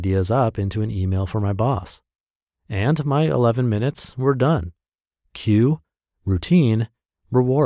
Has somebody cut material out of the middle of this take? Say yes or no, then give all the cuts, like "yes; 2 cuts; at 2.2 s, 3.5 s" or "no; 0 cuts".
no; 0 cuts